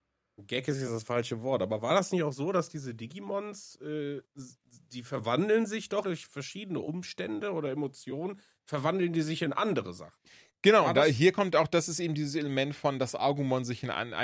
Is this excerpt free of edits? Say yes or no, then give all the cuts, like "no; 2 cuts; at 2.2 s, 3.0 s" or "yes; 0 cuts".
no; 1 cut; at 6.0 s